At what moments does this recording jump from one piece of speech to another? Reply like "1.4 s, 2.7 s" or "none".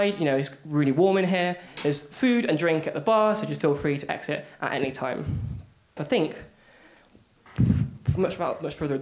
6.0 s